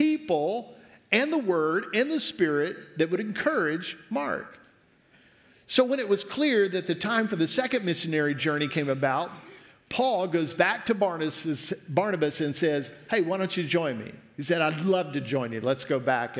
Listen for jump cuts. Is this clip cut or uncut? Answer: uncut